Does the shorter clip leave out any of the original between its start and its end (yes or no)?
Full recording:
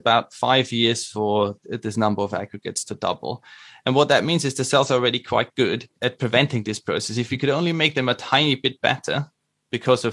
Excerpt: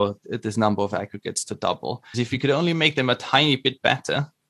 yes